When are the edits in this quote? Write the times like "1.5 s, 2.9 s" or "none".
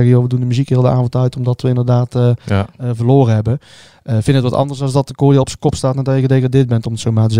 none